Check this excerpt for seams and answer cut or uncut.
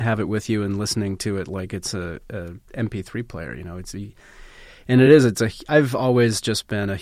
uncut